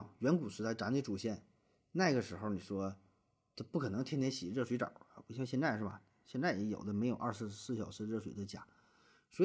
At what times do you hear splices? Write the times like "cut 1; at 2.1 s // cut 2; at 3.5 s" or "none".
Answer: none